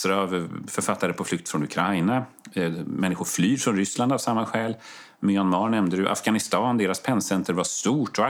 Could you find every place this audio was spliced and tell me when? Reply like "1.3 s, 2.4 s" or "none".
none

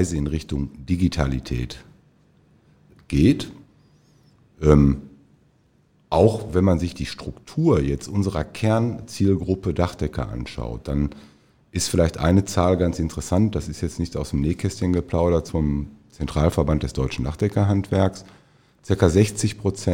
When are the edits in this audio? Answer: 15.5 s

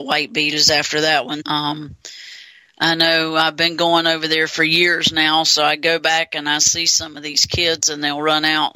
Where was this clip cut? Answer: 1.4 s

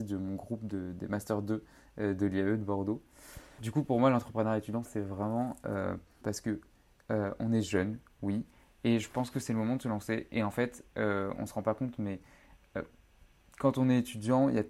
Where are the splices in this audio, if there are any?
3.6 s, 4.9 s, 6.2 s

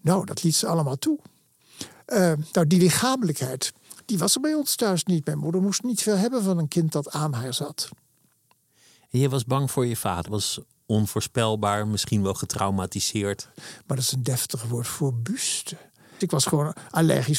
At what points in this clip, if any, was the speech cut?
10.3 s, 13.5 s, 16.2 s

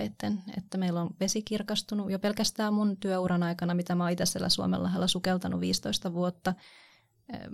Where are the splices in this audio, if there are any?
none

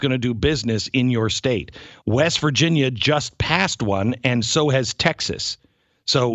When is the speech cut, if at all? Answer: 2.0 s

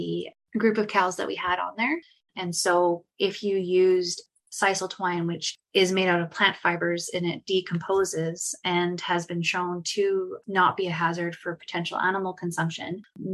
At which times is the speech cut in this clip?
2.3 s

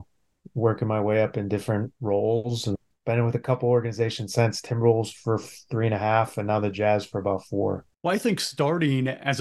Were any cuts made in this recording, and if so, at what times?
none

